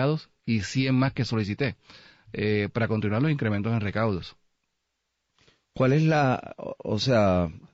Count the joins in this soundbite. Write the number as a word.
zero